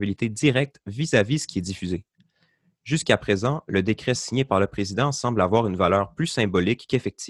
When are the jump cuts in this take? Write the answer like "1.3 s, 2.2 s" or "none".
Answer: none